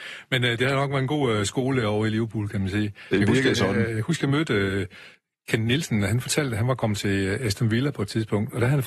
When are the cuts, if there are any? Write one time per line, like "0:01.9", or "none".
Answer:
none